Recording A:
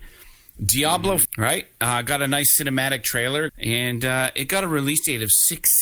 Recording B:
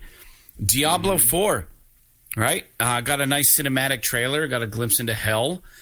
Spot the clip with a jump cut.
A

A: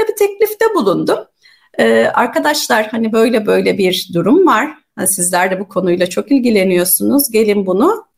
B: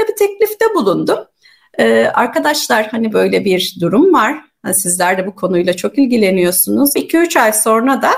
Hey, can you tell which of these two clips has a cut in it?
B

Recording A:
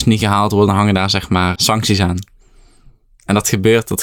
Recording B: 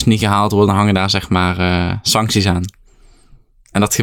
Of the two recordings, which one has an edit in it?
A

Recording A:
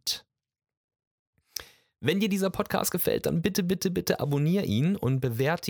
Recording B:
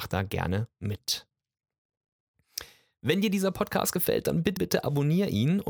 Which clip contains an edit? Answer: B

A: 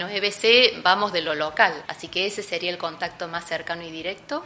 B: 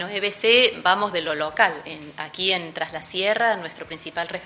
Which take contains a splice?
A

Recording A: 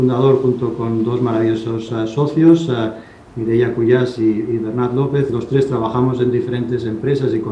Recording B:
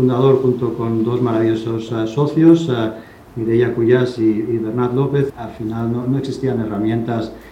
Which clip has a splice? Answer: B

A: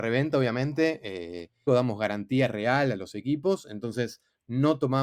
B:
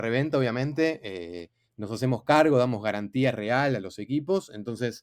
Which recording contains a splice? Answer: A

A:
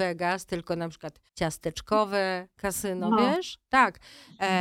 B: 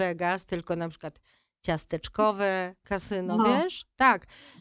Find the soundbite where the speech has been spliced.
A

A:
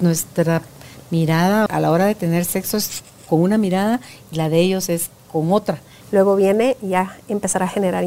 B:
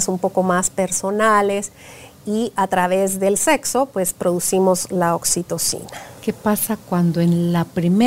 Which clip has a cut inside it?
A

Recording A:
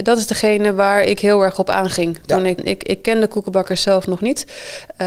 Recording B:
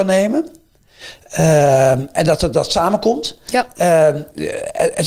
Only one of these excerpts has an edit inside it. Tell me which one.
A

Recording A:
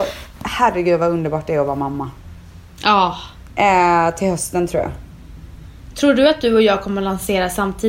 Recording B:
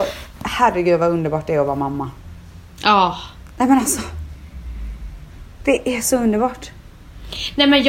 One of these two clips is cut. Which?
A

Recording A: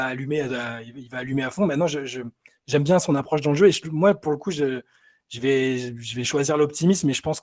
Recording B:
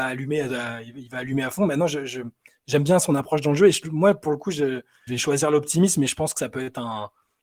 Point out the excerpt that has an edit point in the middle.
B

